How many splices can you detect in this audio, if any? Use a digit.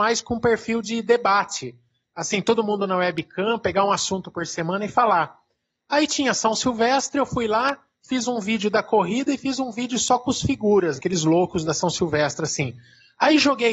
1